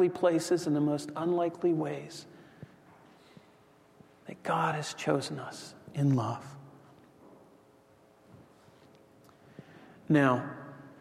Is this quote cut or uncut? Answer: uncut